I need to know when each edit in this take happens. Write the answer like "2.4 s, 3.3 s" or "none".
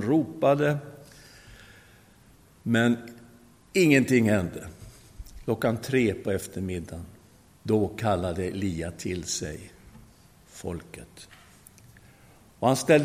7.5 s